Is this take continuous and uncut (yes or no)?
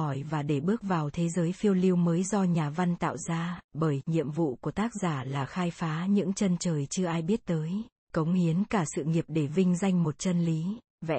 no